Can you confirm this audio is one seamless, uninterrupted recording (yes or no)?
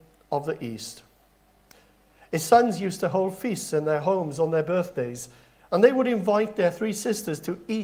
yes